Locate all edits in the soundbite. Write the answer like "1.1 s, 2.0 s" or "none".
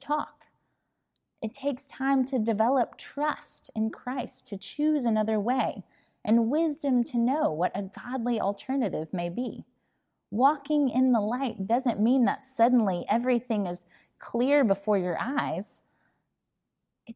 none